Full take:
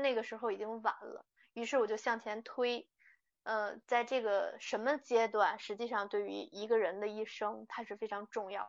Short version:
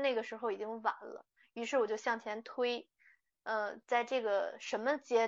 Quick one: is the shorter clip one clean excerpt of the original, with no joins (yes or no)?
yes